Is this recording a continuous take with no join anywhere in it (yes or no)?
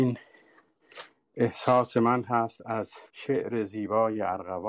no